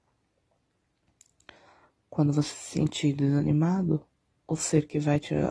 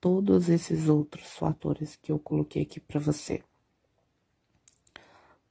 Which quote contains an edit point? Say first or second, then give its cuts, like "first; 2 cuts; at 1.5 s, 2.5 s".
first; 1 cut; at 4.4 s